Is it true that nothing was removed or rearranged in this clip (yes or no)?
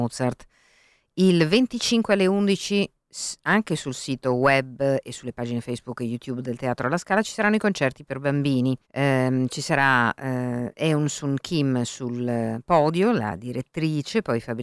no